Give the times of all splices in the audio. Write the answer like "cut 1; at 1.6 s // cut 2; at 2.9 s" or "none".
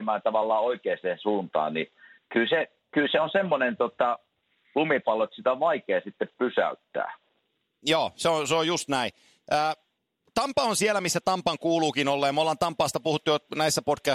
none

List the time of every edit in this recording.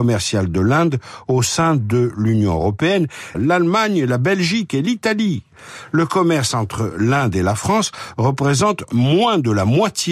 cut 1; at 3.3 s

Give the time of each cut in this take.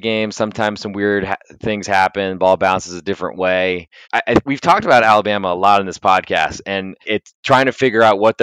cut 1; at 4.0 s // cut 2; at 7.0 s

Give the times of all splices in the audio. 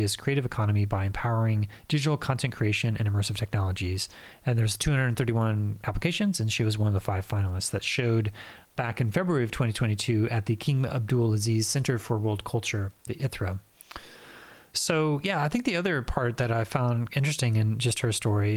cut 1; at 14.7 s

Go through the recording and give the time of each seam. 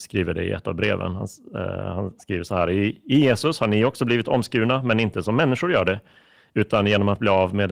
none

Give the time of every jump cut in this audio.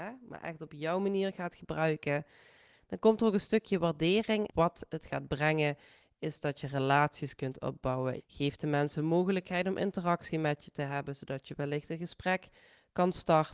cut 1; at 4.5 s // cut 2; at 8.2 s

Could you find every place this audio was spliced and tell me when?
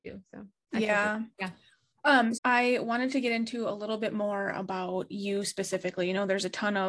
cut 1; at 1.3 s // cut 2; at 2.3 s

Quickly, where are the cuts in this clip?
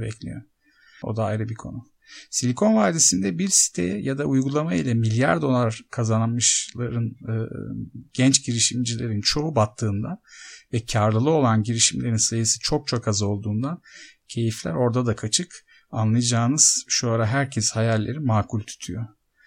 cut 1; at 1.0 s

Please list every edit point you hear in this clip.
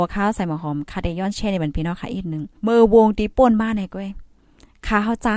cut 1; at 2.6 s

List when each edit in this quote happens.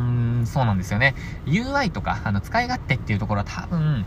none

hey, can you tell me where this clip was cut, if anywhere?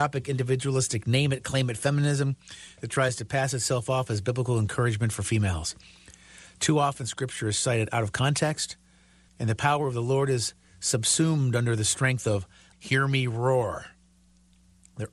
cut 1; at 9.3 s // cut 2; at 12.7 s

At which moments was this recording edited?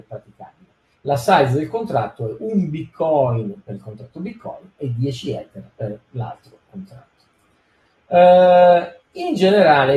cut 1; at 0.9 s

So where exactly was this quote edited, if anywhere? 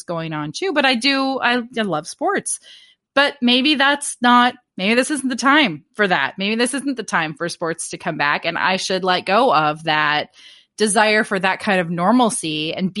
none

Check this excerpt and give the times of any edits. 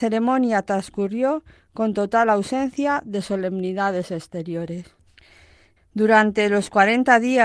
cut 1; at 5.8 s

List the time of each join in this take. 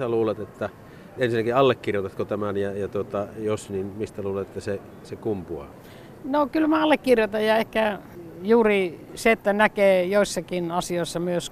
none

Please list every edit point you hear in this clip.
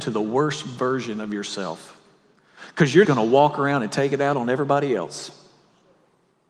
cut 1; at 3.0 s

